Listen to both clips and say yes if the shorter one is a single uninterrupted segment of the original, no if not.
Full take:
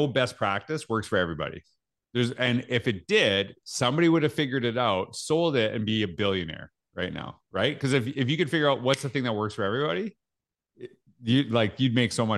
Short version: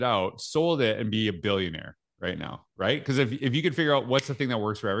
yes